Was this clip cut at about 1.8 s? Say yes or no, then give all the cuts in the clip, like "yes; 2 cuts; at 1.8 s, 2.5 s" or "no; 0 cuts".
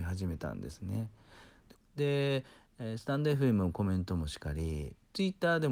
yes; 1 cut; at 1.8 s